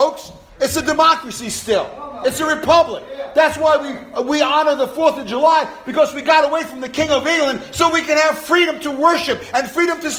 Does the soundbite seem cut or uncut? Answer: uncut